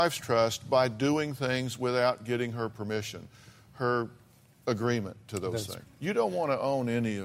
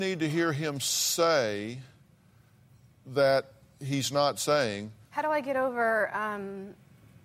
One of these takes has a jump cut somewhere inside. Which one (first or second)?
first